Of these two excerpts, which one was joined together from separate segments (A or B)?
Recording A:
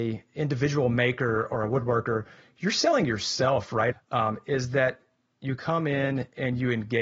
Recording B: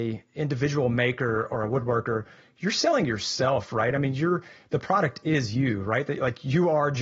A